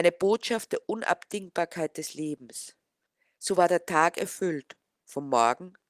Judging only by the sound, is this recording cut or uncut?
uncut